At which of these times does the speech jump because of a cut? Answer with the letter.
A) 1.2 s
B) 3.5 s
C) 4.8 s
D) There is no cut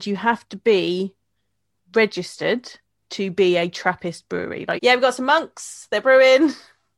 C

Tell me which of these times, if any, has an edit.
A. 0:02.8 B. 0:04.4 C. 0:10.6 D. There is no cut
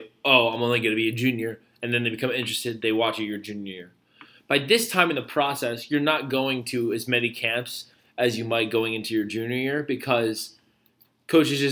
D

